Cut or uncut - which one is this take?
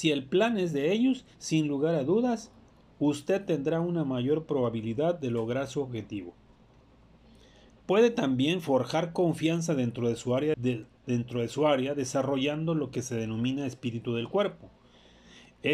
cut